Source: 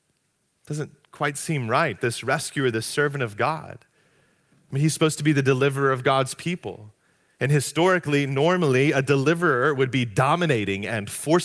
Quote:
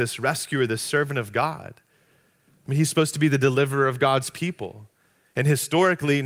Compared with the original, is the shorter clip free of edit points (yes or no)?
yes